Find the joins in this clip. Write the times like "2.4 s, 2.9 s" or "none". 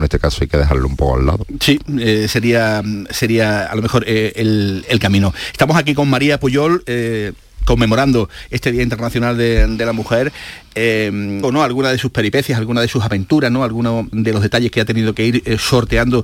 11.4 s, 14.1 s